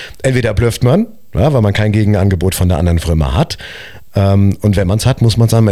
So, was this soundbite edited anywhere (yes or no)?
no